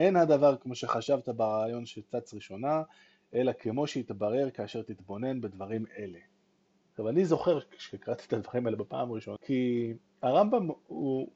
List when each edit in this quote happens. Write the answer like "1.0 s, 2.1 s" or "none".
6.9 s, 9.4 s